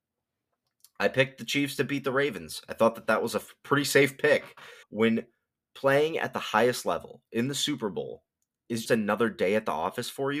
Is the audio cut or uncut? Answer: cut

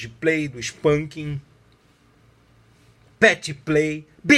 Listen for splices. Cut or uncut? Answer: cut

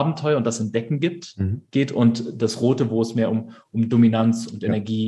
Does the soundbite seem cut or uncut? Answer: uncut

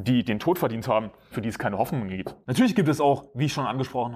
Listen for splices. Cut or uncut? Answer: cut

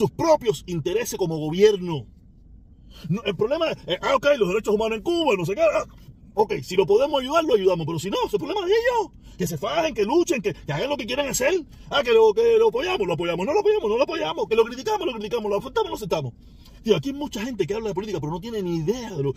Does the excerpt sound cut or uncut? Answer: uncut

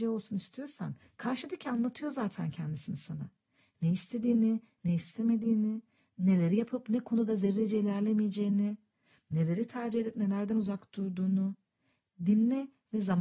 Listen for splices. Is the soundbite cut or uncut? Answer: uncut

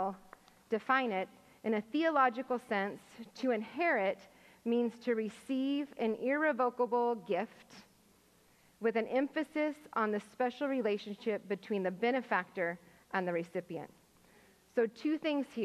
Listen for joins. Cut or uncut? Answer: uncut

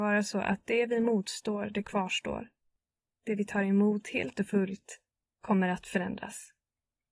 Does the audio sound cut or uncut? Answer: uncut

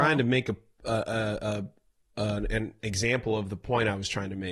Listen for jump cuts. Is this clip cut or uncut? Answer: uncut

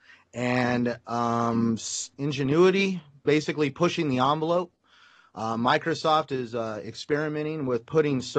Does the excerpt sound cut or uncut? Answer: cut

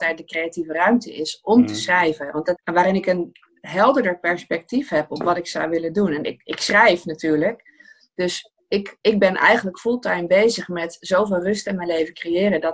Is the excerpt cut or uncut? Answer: cut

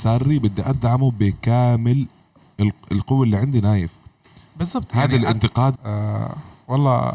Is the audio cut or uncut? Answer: cut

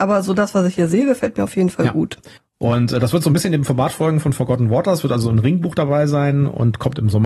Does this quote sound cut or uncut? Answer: cut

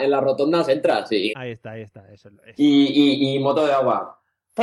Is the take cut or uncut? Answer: cut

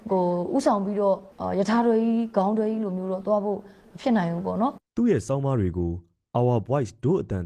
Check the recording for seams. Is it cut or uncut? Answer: cut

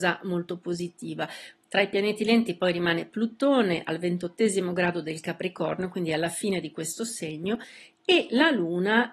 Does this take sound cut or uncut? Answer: cut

